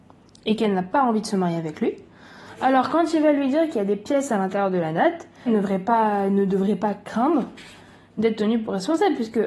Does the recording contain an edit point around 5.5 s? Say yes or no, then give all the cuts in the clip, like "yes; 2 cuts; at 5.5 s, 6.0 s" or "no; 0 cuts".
yes; 1 cut; at 5.5 s